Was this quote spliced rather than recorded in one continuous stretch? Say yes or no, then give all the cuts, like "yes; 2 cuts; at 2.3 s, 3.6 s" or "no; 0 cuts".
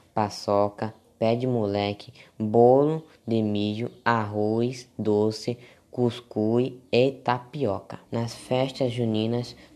yes; 1 cut; at 8.1 s